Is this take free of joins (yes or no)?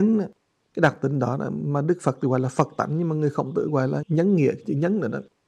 no